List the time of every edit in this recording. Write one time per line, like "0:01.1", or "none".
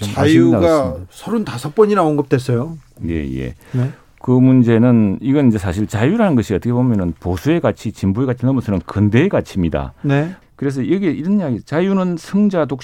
0:10.4